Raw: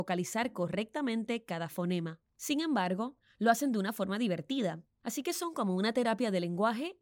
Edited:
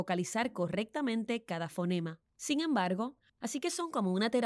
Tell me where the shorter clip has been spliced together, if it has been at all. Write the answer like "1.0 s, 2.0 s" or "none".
3.3 s

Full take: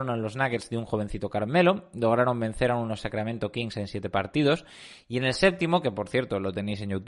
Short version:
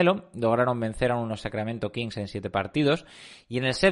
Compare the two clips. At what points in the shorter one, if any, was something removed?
none

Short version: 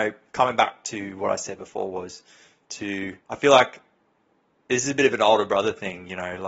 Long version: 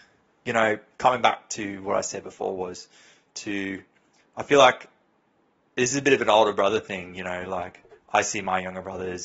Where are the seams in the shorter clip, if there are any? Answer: 3.2 s

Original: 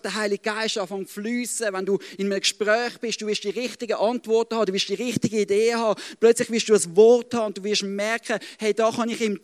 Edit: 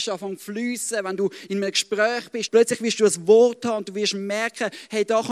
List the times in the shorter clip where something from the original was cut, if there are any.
2.5 s

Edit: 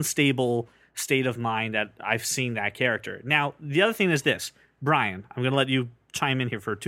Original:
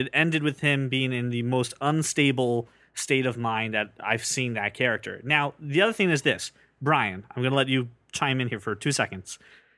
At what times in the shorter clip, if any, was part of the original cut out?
none

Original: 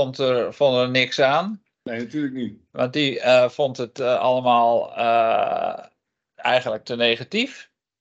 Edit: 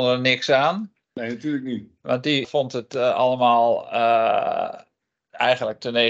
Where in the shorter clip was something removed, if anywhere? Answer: 2.4 s

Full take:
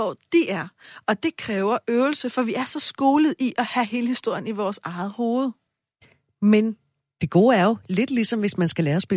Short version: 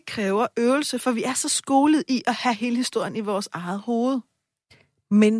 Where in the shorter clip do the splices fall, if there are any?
none

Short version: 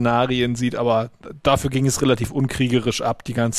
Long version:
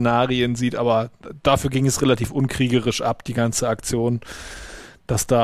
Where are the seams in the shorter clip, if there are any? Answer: none

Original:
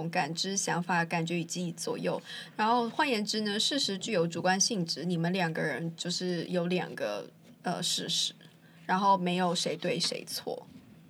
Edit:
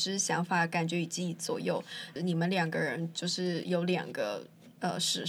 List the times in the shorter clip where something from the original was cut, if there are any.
2.2 s

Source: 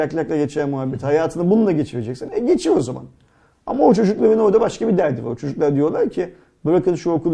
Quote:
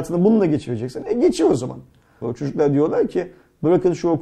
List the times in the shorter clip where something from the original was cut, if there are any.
2.2 s

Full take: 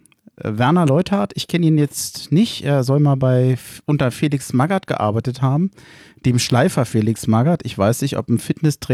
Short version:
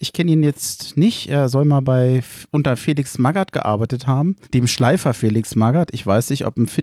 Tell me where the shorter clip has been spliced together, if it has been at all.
4.4 s

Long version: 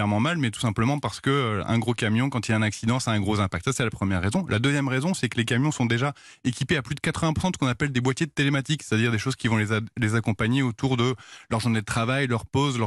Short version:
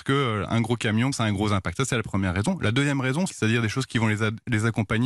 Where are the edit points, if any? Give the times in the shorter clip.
1.1 s, 3.3 s

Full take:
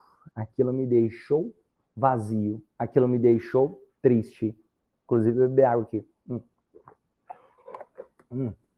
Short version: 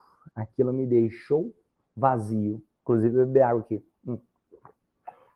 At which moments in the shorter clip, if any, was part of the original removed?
2.7 s

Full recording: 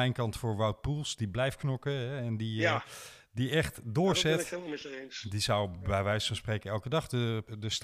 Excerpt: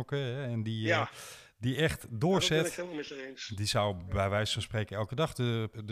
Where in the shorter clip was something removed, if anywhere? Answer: none

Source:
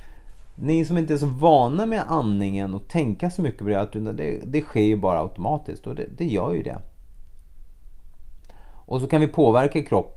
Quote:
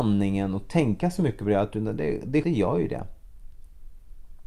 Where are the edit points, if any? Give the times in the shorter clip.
2.4 s

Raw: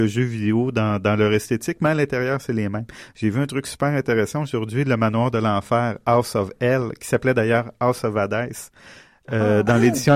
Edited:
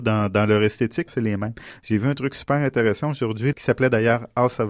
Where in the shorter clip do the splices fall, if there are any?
1.1 s, 3.5 s

